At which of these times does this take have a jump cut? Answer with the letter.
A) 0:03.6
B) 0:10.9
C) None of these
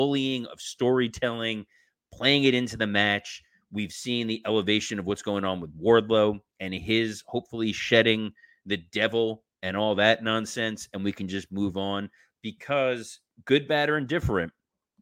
C